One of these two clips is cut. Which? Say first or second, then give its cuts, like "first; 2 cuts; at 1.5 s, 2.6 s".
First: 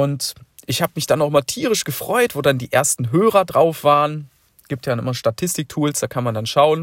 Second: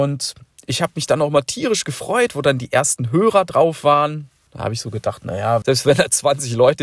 second; 2 cuts; at 4.5 s, 5.6 s